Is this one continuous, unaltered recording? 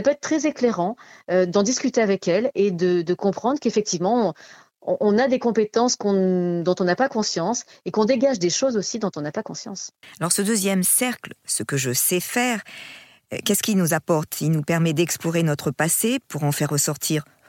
no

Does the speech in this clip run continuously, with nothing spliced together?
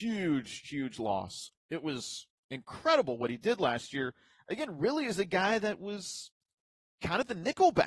no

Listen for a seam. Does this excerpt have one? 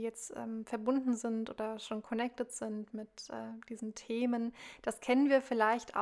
no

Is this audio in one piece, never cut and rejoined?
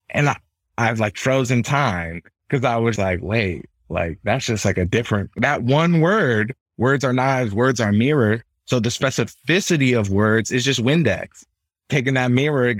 no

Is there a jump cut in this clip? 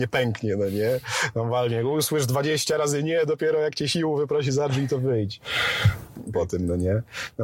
yes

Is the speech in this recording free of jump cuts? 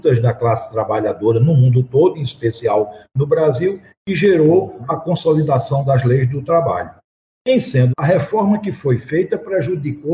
no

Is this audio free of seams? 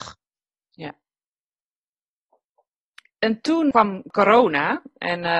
no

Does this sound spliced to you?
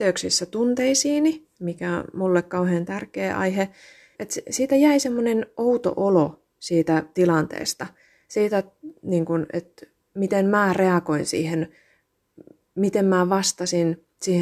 yes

